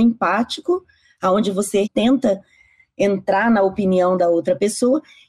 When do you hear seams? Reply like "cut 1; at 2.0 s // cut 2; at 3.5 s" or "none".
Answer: cut 1; at 1.8 s